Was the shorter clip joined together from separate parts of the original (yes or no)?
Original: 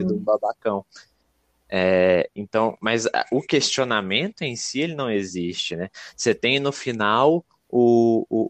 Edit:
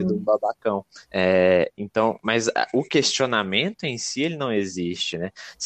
yes